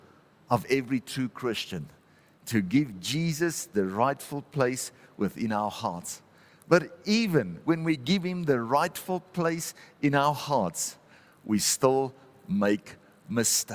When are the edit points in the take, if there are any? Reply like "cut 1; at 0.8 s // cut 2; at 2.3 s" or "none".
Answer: none